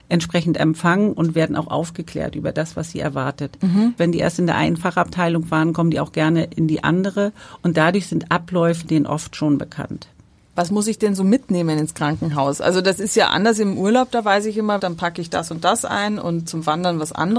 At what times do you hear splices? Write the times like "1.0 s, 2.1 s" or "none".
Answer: 4.0 s, 14.8 s, 16.5 s